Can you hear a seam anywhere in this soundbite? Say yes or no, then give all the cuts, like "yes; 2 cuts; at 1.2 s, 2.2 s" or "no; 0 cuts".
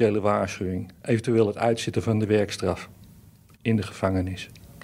no; 0 cuts